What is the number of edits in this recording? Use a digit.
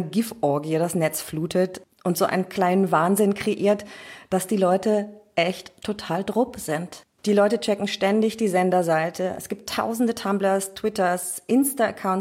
1